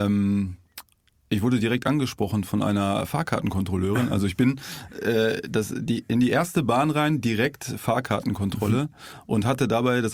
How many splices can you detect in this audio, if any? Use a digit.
0